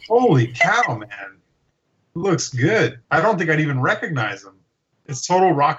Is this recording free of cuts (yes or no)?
no